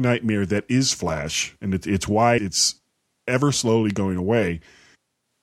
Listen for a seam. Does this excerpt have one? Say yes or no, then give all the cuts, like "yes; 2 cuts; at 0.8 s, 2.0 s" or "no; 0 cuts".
yes; 2 cuts; at 2.4 s, 3.5 s